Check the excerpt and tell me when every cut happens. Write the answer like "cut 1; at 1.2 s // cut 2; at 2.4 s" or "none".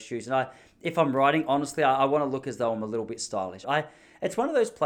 cut 1; at 3.6 s